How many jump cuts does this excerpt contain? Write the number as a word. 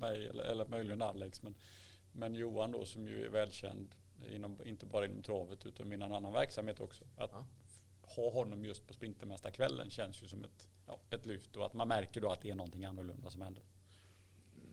one